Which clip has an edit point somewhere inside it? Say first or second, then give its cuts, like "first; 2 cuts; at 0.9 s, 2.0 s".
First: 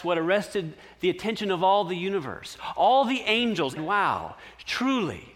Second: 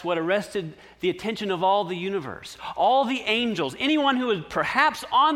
first; 1 cut; at 3.8 s